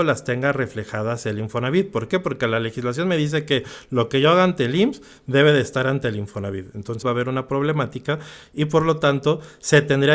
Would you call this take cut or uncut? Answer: cut